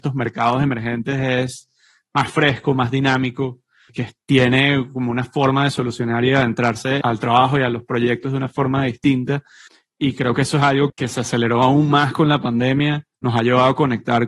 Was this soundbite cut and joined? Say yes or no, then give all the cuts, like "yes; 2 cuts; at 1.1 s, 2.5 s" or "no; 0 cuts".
yes; 1 cut; at 10.9 s